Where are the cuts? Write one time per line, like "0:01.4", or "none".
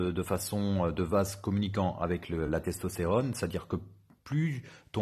none